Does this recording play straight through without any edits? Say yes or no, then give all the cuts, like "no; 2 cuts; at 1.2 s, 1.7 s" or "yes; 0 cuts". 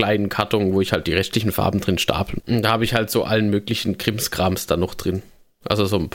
no; 1 cut; at 2.4 s